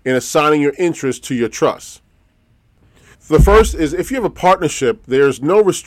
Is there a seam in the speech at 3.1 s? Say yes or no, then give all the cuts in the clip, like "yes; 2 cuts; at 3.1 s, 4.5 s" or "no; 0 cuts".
yes; 1 cut; at 3.1 s